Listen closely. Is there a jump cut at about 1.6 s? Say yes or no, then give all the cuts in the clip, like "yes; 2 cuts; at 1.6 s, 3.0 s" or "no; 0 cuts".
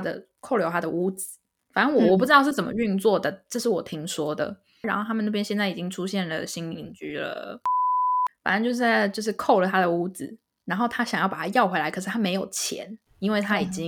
no; 2 cuts; at 4.8 s, 8.3 s